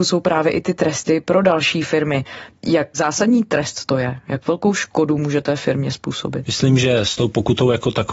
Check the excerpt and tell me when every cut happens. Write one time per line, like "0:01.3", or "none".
none